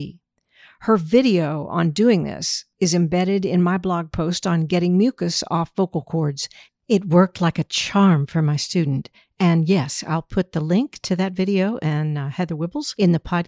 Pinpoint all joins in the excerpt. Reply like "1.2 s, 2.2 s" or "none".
none